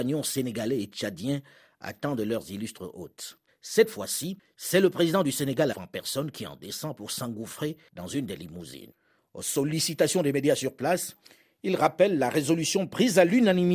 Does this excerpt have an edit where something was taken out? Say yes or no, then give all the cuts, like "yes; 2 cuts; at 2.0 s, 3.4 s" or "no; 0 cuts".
yes; 2 cuts; at 3.5 s, 5.7 s